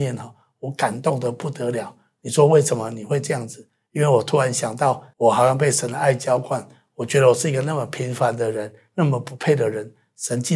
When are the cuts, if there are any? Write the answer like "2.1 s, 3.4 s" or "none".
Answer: 5.1 s